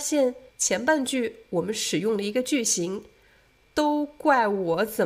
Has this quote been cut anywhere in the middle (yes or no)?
no